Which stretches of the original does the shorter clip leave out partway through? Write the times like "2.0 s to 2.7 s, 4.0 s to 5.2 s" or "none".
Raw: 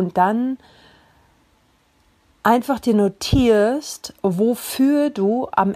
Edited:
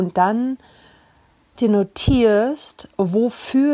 1.6 s to 2.8 s